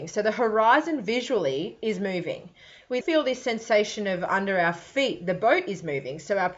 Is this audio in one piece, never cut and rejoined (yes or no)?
no